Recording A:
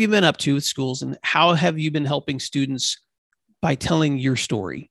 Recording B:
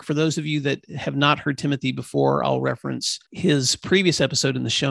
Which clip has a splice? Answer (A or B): B